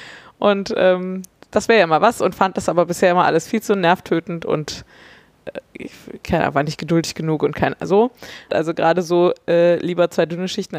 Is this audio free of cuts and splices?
no; 1 cut; at 8.5 s

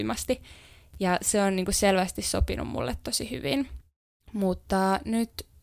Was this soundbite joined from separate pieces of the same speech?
no; 0 cuts

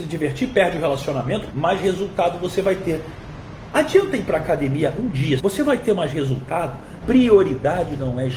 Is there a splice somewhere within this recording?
yes; 3 cuts; at 1.5 s, 5.4 s, 7.0 s

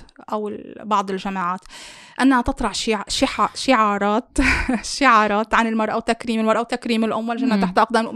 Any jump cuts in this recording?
no; 0 cuts

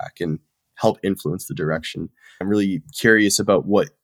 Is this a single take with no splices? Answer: no; 1 cut; at 2.4 s

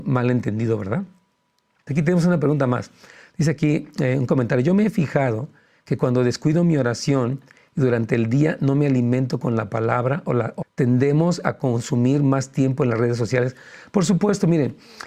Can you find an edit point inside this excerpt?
yes; 2 cuts; at 1.9 s, 10.6 s

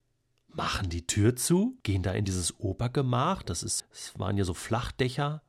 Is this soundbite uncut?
no; 2 cuts; at 1.8 s, 3.8 s

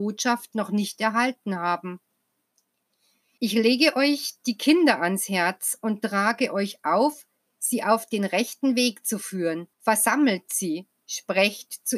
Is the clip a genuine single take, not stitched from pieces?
no; 2 cuts; at 3.4 s, 9.7 s

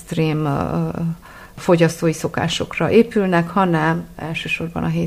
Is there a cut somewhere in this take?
no; 0 cuts

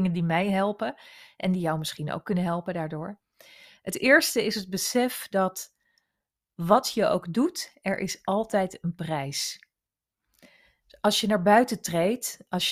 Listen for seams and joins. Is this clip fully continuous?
yes; 0 cuts

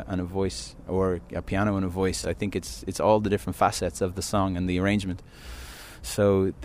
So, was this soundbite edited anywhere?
no; 0 cuts

